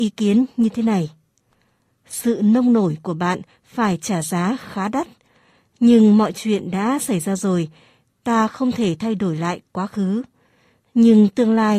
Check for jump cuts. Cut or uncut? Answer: uncut